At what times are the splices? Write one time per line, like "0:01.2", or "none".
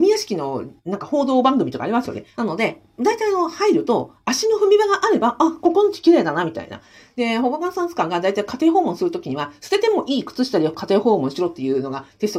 0:02.3